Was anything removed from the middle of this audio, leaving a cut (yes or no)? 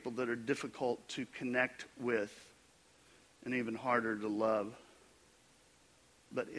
no